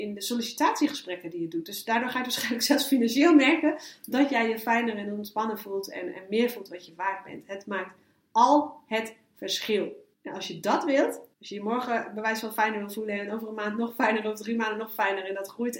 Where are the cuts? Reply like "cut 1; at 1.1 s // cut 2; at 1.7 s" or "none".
cut 1; at 10.1 s // cut 2; at 11.3 s